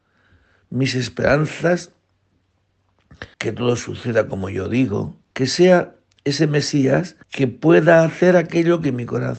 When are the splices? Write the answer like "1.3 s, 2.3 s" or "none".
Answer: 3.3 s, 5.3 s, 7.2 s